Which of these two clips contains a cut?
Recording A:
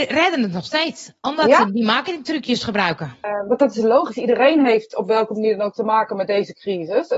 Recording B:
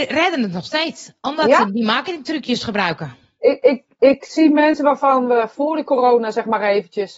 A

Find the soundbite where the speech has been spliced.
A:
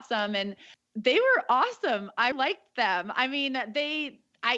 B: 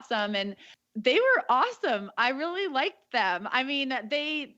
A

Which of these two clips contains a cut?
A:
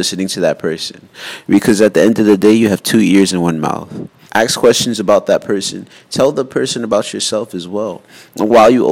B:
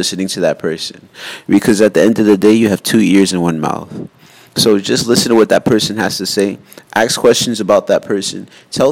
A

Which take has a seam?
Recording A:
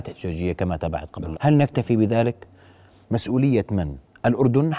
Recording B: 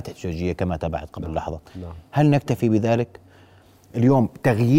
A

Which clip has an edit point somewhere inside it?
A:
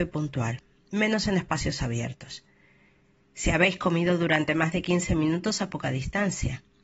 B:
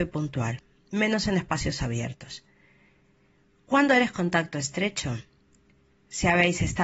A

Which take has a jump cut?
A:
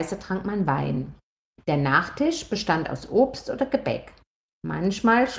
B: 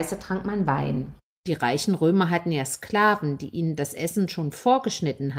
B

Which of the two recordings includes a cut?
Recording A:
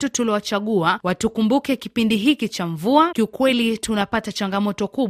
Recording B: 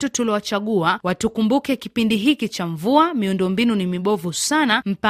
A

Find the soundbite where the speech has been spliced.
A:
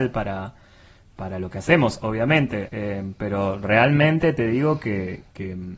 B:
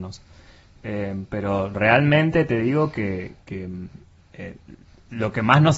A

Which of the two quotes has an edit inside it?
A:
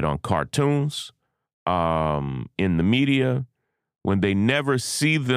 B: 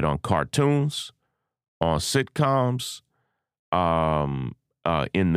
A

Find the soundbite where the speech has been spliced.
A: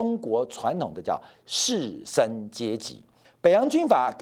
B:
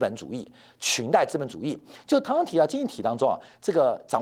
A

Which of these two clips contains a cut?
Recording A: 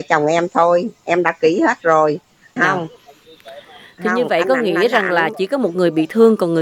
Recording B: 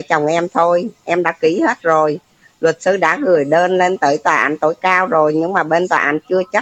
A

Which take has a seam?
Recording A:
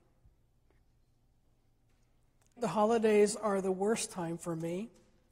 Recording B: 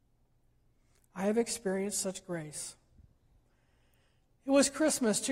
A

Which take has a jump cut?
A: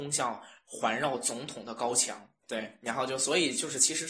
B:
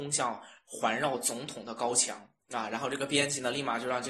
A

